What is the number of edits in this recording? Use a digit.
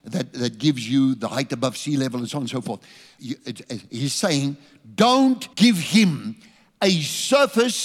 2